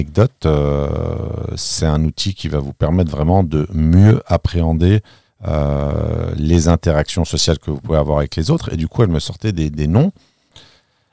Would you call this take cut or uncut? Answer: uncut